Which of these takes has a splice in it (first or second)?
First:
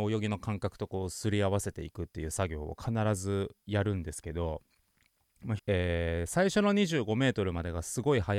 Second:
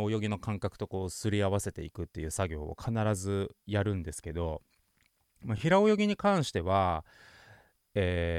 first